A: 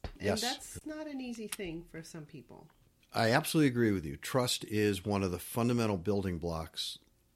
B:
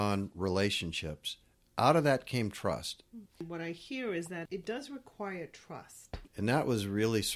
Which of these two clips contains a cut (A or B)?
B